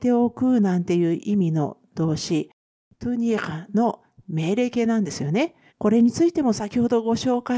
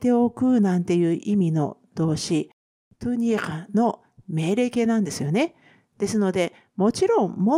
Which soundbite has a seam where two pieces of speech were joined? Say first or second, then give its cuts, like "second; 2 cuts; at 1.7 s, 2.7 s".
first; 1 cut; at 5.7 s